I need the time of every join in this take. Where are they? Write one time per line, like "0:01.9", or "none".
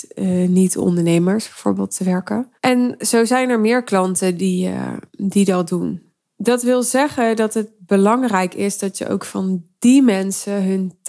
0:02.6
0:06.2